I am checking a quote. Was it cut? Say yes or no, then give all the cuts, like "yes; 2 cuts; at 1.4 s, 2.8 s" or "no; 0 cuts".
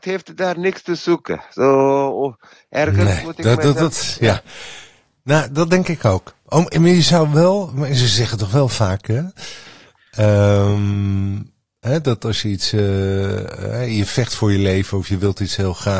no; 0 cuts